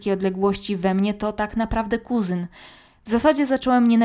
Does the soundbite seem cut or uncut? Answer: uncut